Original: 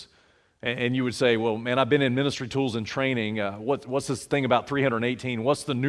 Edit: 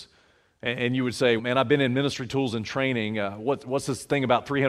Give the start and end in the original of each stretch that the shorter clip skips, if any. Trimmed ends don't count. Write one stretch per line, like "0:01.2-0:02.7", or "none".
0:01.4-0:01.6

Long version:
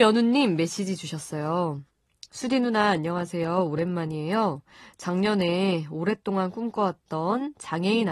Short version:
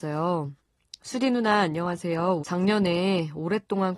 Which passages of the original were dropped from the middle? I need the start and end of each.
0:03.7-0:05.0

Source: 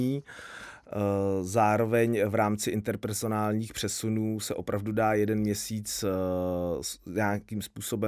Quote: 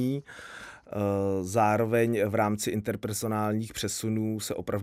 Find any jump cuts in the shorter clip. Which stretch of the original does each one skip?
none

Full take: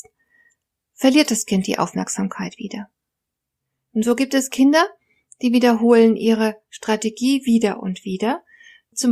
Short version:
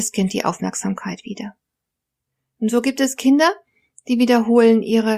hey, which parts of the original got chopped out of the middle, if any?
none

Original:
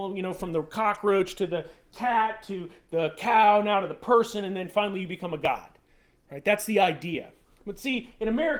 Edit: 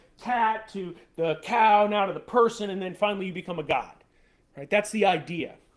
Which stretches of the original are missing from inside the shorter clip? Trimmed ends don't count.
none

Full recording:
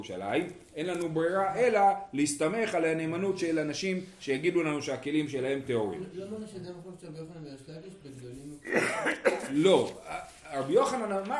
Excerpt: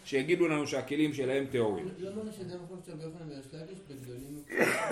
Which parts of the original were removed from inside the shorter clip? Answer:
none

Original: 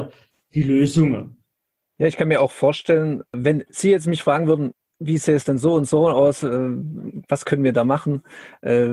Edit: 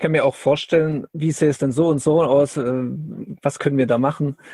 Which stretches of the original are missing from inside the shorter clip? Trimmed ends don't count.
0:03.3-0:05.0

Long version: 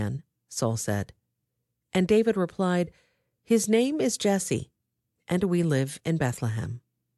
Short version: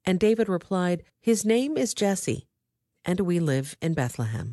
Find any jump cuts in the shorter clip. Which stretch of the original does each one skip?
0:03.0-0:03.3

